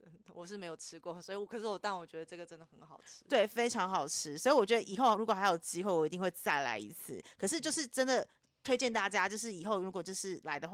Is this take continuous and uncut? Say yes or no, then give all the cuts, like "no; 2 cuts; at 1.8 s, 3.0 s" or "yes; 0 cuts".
yes; 0 cuts